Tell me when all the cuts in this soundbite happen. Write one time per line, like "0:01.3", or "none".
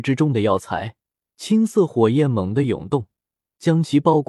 0:01.2